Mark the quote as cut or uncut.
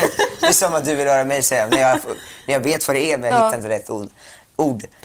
uncut